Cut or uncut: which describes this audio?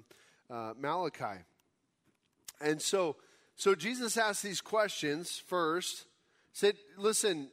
uncut